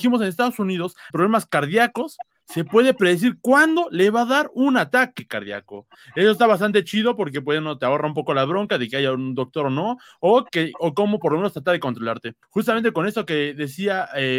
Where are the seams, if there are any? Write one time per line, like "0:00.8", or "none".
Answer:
0:01.1
0:12.4